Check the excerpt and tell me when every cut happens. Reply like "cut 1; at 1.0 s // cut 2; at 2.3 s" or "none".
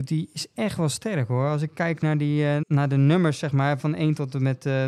cut 1; at 2.6 s // cut 2; at 3.8 s